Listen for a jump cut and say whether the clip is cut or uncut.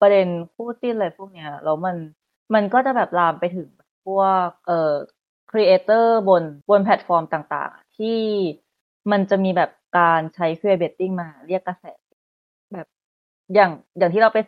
cut